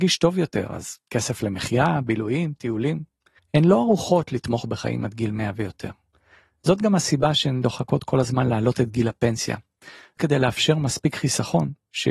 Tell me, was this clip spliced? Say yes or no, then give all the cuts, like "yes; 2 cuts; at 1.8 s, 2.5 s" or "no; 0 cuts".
yes; 1 cut; at 3.4 s